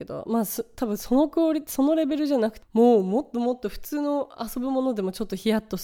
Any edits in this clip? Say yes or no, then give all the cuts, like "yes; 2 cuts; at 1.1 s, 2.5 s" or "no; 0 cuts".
yes; 1 cut; at 2.6 s